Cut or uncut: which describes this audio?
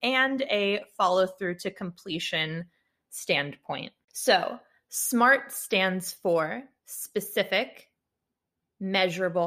uncut